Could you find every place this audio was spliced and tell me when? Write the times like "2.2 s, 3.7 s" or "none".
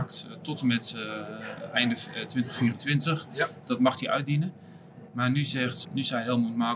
5.8 s